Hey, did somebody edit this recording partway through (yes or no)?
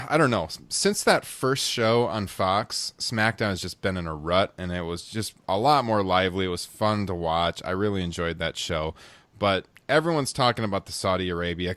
no